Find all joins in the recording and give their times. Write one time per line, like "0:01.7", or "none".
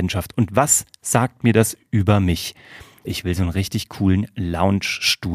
0:03.0